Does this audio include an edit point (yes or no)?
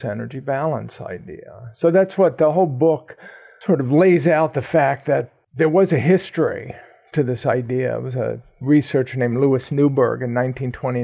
no